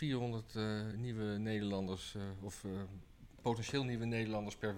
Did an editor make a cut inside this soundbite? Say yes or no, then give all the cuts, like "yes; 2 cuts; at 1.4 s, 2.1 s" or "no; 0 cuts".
yes; 1 cut; at 0.9 s